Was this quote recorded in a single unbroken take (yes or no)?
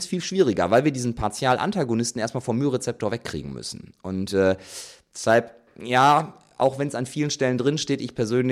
yes